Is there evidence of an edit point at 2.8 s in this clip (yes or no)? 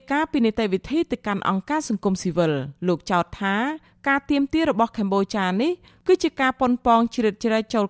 yes